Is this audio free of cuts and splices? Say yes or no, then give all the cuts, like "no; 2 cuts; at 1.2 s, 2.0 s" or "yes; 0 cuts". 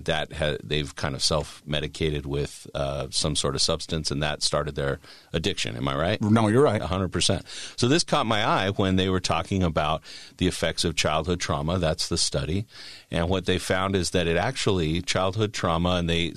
yes; 0 cuts